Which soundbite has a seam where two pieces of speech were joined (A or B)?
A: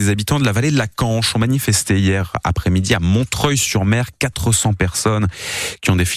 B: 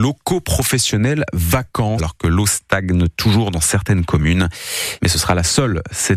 B